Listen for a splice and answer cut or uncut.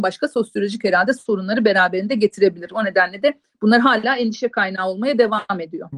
uncut